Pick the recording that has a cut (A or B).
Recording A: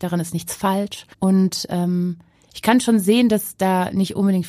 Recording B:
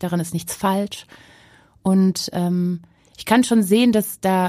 A